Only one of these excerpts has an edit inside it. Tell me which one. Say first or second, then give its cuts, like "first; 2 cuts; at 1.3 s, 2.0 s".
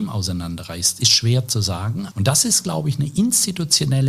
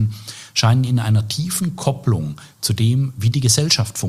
first; 1 cut; at 2.1 s